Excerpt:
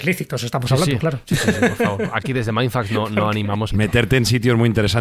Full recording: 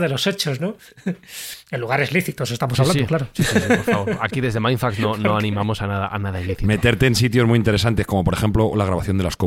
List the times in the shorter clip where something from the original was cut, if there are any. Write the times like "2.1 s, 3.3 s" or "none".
3.7 s